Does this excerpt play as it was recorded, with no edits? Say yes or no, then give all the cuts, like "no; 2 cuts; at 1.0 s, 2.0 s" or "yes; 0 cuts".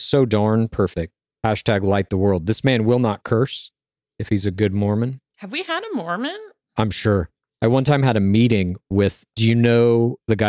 yes; 0 cuts